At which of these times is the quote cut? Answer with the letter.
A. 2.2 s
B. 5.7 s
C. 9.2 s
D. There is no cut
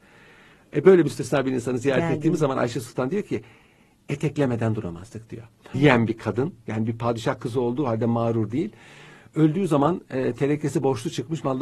B